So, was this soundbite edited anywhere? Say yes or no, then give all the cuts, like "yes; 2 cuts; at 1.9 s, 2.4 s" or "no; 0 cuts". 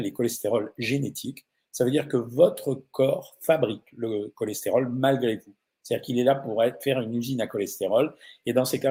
no; 0 cuts